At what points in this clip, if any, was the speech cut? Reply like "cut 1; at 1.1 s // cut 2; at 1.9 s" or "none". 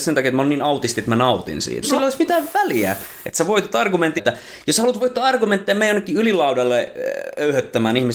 cut 1; at 1.8 s // cut 2; at 4.2 s